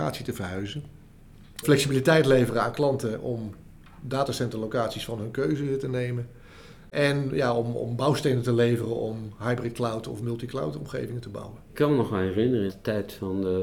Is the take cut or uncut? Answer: cut